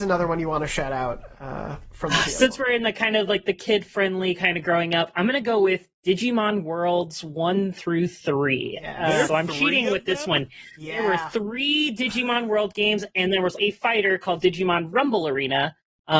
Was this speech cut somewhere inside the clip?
yes; 2 cuts; at 9.3 s, 13.6 s

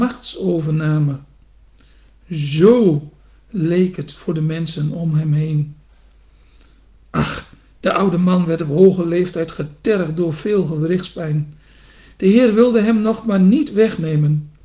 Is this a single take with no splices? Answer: yes; 0 cuts

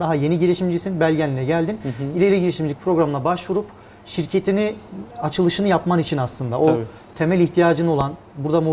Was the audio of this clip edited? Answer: no; 0 cuts

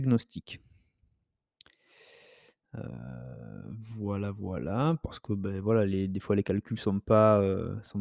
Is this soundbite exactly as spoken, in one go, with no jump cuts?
yes; 0 cuts

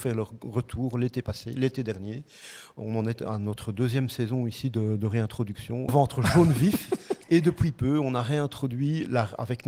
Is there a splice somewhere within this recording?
yes; 2 cuts; at 5.9 s, 7.2 s

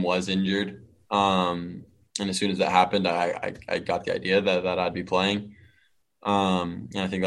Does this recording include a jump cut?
no; 0 cuts

